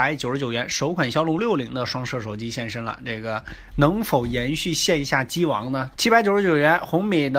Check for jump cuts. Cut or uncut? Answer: cut